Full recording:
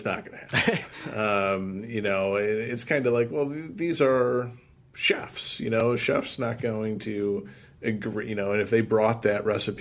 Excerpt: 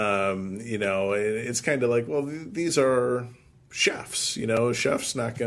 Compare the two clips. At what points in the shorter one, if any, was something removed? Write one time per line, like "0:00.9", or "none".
none